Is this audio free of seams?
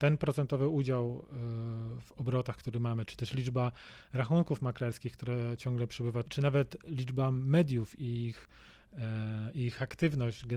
no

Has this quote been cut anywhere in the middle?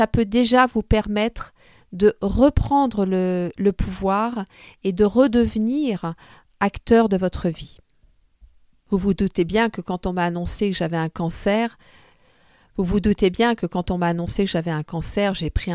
no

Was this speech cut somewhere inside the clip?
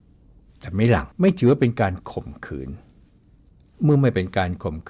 yes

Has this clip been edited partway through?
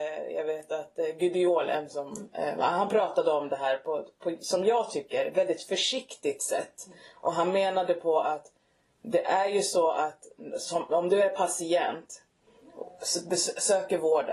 no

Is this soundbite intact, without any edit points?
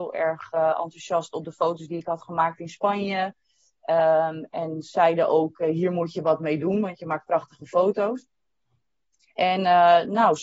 yes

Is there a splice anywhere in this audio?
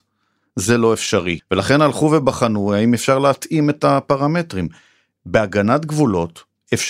yes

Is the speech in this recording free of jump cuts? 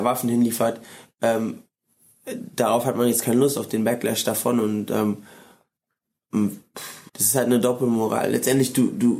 no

